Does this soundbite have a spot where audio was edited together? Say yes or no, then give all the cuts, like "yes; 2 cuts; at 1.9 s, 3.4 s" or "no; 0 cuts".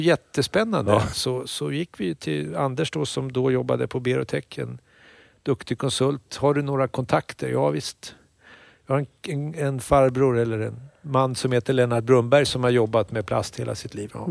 yes; 1 cut; at 1.1 s